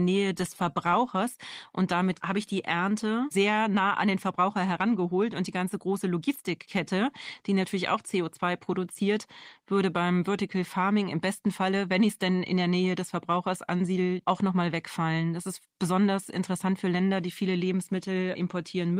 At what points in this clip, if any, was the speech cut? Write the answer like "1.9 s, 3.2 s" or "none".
none